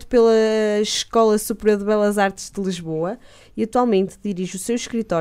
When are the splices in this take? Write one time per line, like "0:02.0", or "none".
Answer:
0:03.4